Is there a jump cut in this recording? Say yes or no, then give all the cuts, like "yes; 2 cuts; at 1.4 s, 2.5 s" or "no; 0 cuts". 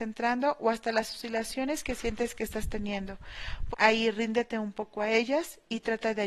yes; 1 cut; at 3.7 s